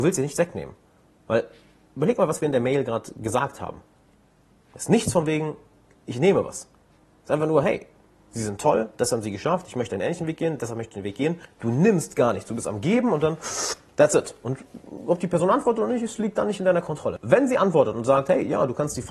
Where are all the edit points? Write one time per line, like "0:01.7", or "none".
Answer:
0:11.4